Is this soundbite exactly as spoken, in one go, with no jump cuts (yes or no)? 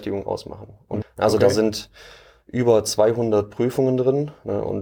no